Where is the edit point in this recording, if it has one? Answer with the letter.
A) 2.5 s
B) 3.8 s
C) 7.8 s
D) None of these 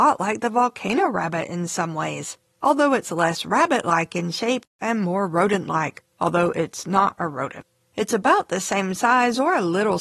C